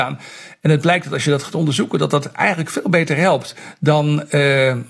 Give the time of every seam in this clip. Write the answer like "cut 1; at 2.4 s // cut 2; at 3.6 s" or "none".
none